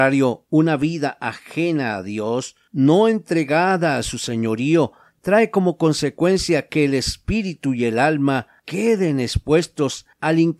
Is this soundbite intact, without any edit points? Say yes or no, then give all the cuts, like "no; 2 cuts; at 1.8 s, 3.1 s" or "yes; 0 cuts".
yes; 0 cuts